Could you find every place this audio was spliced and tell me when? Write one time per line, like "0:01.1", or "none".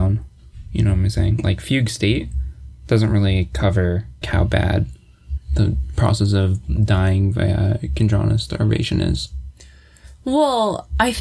0:04.2

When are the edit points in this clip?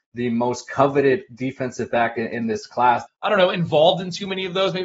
0:03.1

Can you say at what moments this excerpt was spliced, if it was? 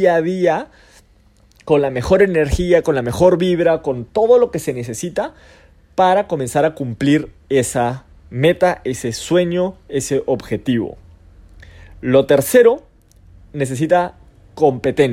none

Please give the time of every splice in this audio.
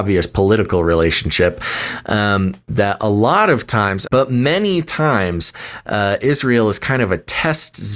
0:04.0

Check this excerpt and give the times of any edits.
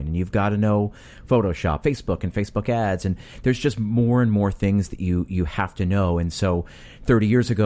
0:01.8

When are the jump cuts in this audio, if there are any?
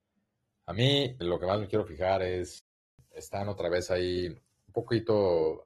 0:01.2

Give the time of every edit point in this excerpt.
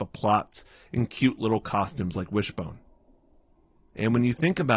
none

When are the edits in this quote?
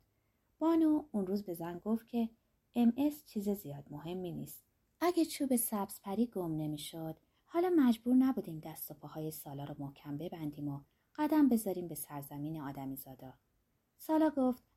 0:04.8

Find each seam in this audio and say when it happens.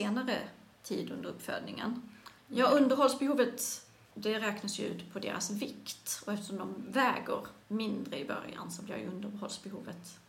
0:02.4
0:07.6

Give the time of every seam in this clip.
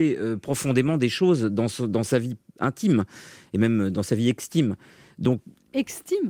none

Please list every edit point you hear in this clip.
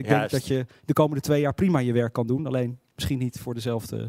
none

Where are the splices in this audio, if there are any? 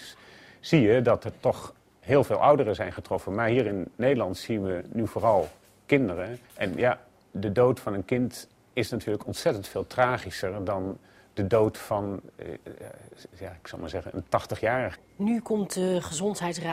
0:06.4
0:15.0

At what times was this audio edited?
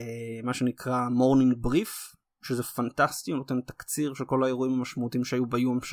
none

